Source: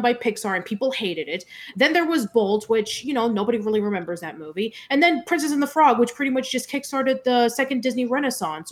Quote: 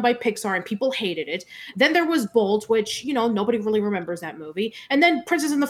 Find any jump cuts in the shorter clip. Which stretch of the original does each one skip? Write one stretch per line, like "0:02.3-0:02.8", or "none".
none